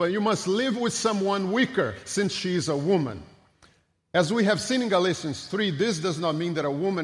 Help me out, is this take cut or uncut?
uncut